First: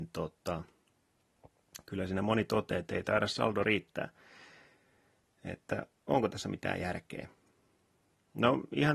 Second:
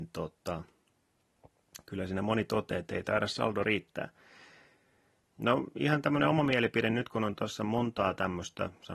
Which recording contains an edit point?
second; 1 cut; at 5.3 s

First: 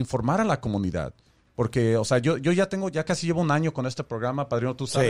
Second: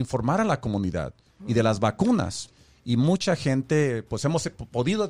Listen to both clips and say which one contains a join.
second; 2 cuts; at 1.4 s, 2.5 s

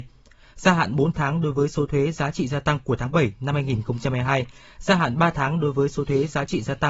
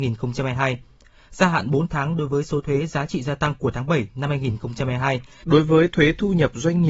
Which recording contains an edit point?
second; 1 cut; at 5.4 s

